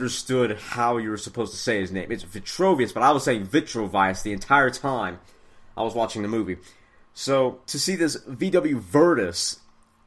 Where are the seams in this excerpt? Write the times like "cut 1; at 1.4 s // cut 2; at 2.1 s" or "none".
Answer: cut 1; at 7.6 s